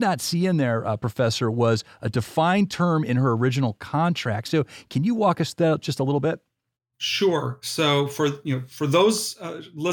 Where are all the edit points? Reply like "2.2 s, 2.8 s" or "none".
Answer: none

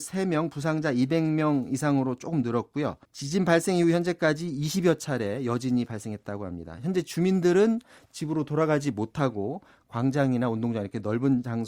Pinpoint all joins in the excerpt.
3.0 s

